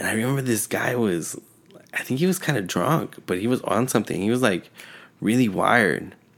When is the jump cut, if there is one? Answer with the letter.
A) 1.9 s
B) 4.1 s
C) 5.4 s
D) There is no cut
D